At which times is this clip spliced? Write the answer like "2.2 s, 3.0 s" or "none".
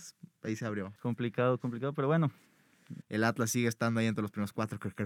1.0 s, 3.0 s